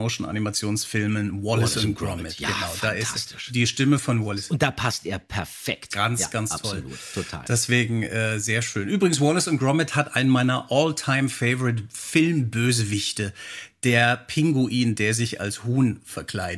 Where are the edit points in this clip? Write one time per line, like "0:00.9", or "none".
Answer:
none